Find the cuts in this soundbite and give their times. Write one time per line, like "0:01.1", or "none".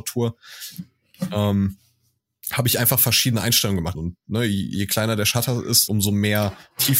0:03.9
0:05.9